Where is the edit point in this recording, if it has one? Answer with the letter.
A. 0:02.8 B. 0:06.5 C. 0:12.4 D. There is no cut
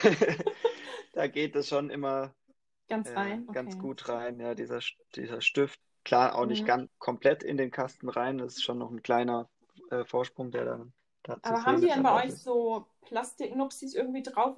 D